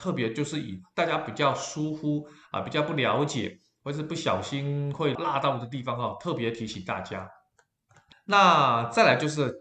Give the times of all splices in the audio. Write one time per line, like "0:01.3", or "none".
0:05.2
0:08.1